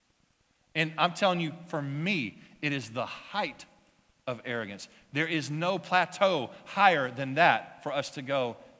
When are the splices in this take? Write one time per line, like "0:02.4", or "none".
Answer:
none